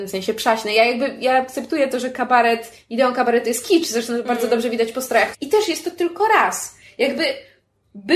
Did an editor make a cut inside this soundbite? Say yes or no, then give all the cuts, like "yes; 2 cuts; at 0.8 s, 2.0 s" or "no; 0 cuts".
yes; 1 cut; at 5.3 s